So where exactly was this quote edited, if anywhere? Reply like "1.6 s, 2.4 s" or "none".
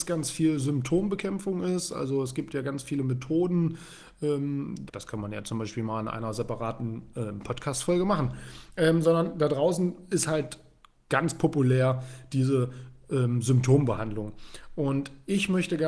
4.9 s